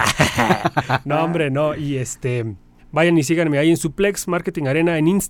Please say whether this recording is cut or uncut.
cut